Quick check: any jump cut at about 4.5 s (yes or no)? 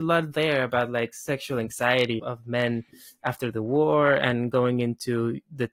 no